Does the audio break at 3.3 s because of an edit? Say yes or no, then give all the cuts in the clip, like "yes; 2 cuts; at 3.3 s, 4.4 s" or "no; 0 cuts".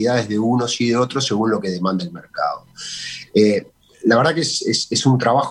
yes; 1 cut; at 3.3 s